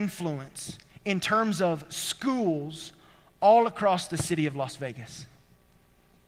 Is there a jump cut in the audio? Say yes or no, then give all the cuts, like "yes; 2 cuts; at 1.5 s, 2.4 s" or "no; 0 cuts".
no; 0 cuts